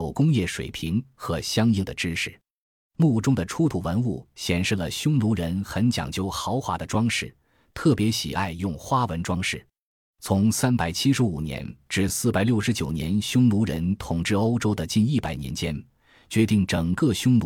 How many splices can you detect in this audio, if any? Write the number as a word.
one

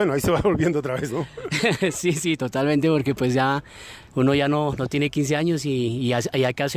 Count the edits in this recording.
one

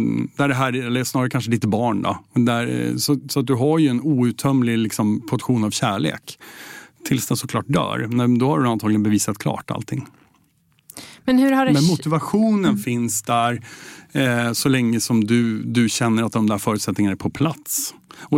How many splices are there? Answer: zero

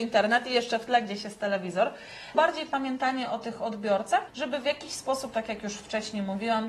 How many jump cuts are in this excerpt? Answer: two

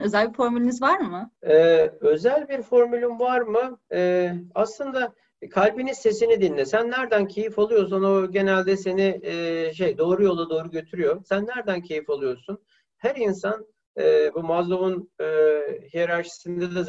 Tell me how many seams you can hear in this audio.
one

